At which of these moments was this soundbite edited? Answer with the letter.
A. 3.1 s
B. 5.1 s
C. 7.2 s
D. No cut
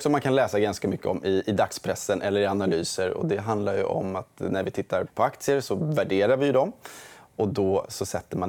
B